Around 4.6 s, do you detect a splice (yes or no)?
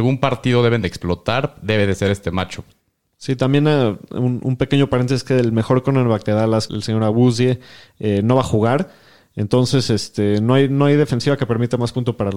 no